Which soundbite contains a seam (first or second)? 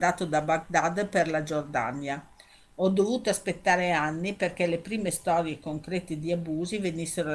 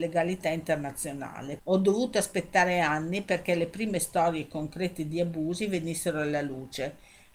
second